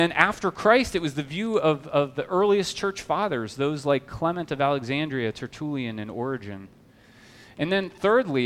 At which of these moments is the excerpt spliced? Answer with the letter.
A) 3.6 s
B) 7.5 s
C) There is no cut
C